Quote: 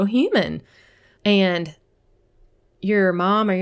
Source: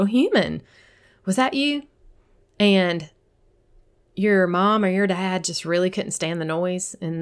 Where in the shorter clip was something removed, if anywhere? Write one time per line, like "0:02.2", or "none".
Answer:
0:01.2